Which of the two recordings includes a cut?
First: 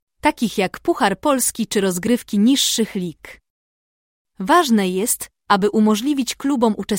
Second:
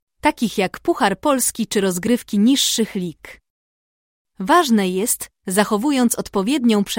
second; 1 cut; at 5.4 s

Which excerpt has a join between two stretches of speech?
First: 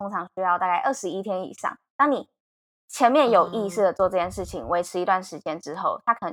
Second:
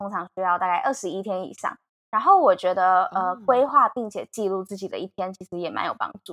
second; 1 cut; at 1.9 s

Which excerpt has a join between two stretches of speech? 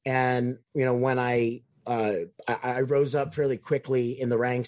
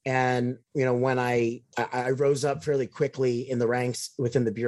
second; 1 cut; at 1.7 s

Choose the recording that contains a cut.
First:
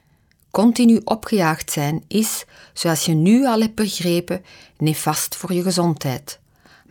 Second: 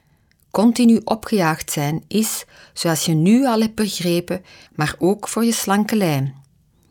second; 1 cut; at 4.7 s

